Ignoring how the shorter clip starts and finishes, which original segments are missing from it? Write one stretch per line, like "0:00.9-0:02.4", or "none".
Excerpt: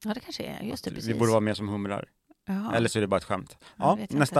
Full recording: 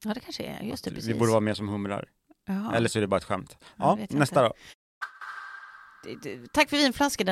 none